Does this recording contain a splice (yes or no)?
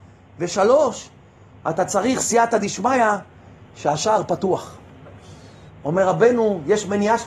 yes